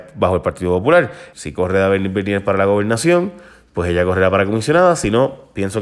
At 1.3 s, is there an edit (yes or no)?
yes